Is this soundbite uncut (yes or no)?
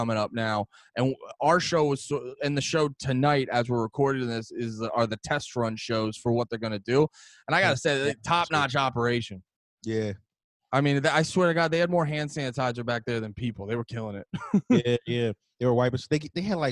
yes